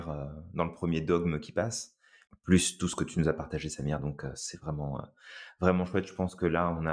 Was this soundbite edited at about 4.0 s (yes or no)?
no